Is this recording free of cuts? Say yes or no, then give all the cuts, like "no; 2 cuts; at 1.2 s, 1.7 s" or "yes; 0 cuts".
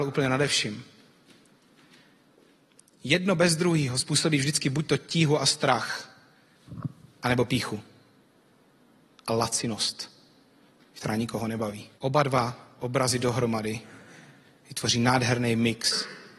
no; 1 cut; at 12.0 s